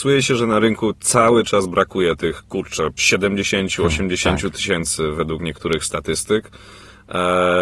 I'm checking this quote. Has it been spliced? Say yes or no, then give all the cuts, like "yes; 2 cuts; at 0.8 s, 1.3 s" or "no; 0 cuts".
no; 0 cuts